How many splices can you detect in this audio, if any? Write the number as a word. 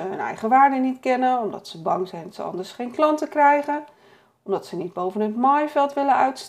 zero